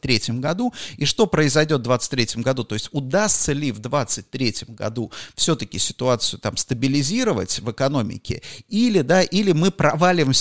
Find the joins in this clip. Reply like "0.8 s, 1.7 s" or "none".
none